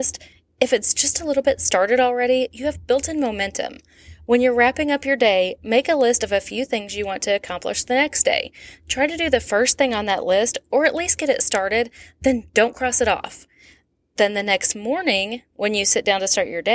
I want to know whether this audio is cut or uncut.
uncut